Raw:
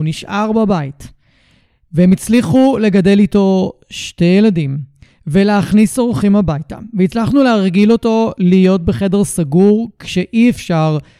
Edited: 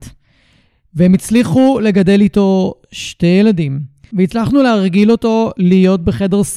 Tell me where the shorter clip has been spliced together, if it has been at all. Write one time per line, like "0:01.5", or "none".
0:04.1